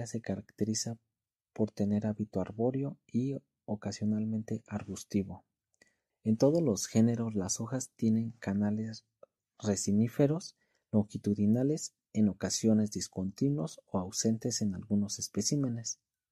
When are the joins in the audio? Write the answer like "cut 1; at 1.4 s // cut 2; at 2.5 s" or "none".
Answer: cut 1; at 6.1 s